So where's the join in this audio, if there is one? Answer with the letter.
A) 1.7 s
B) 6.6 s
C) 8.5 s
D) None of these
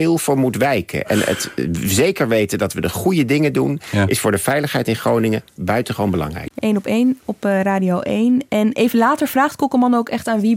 B